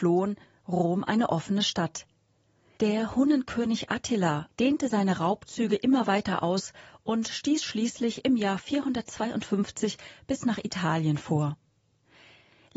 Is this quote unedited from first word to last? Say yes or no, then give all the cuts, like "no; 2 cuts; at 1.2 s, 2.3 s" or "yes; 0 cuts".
no; 2 cuts; at 2.8 s, 4.5 s